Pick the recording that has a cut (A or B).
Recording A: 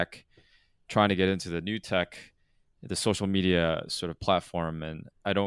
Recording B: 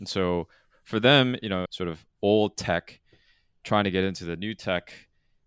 B